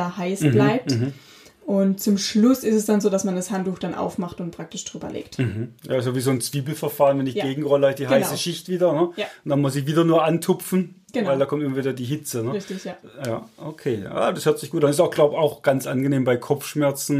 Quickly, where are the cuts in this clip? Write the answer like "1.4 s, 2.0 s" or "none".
none